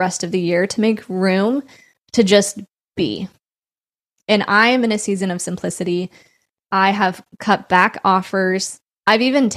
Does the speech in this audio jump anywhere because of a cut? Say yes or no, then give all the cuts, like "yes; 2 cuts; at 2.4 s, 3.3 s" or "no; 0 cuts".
no; 0 cuts